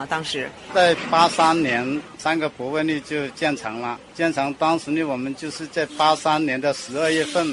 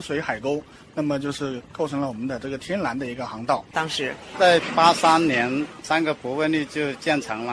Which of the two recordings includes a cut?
second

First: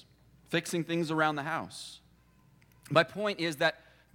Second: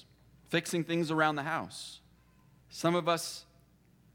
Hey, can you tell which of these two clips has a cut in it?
second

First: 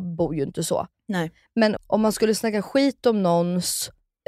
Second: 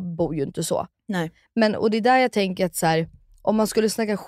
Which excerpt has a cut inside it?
first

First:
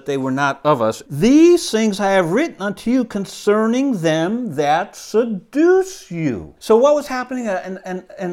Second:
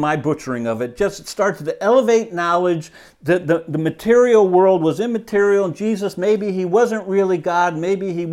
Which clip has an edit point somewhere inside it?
first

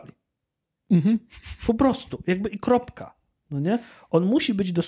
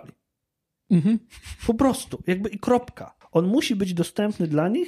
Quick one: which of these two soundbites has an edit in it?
second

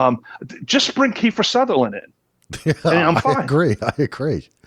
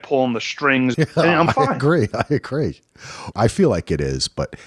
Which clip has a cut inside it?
second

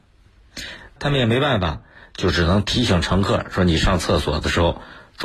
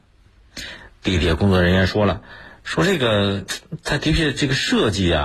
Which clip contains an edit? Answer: first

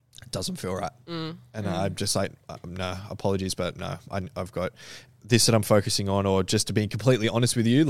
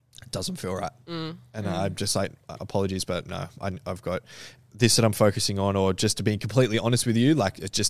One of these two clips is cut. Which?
second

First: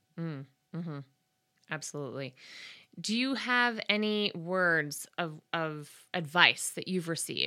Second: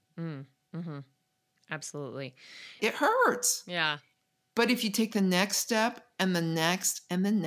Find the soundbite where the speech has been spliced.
second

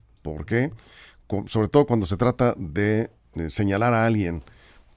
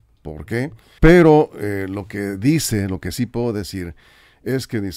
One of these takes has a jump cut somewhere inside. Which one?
second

